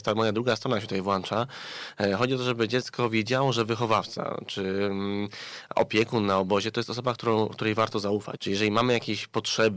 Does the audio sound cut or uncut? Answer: cut